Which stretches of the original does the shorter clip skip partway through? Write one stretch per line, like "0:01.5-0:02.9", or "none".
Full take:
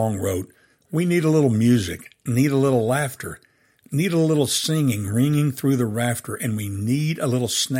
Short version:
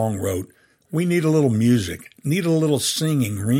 0:02.1-0:03.8